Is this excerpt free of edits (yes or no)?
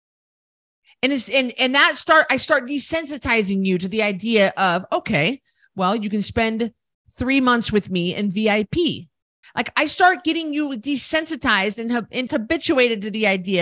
no